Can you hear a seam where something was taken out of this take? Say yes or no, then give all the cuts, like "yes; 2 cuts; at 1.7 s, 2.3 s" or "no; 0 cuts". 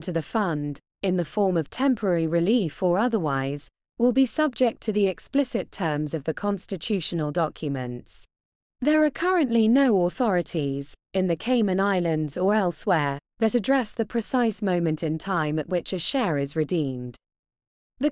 yes; 2 cuts; at 8.6 s, 13.3 s